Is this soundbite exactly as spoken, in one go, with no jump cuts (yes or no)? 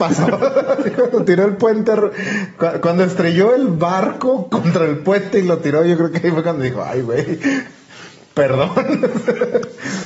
yes